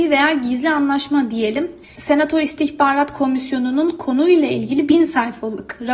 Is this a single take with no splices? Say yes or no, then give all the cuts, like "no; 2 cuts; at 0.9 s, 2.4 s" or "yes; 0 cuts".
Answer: no; 1 cut; at 1.8 s